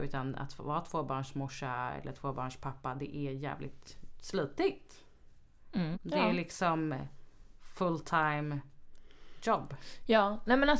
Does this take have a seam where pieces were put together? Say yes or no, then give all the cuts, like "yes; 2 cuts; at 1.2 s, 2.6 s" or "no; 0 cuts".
yes; 1 cut; at 5.9 s